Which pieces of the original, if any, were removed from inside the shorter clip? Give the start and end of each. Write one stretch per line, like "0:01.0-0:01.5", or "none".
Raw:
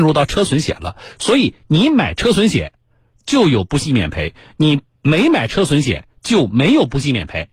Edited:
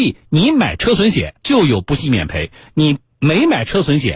0:02.8-0:03.2